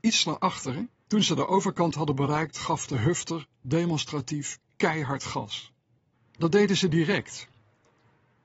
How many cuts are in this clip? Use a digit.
2